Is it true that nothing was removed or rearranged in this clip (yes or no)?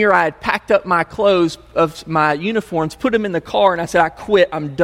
yes